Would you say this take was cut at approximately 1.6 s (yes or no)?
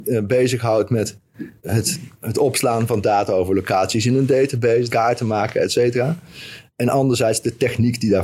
yes